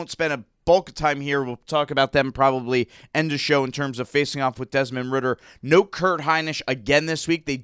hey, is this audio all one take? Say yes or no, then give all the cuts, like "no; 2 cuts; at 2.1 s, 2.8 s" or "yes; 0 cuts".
yes; 0 cuts